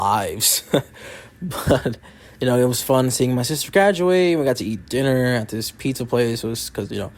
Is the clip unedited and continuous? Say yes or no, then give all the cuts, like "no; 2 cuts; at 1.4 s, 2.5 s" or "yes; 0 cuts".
yes; 0 cuts